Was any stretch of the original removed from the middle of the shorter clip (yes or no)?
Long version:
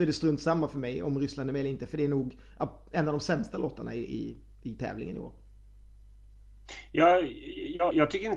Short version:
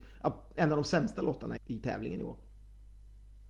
yes